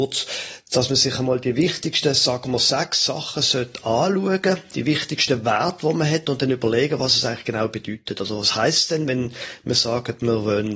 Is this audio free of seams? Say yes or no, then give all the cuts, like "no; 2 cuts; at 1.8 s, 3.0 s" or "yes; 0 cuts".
yes; 0 cuts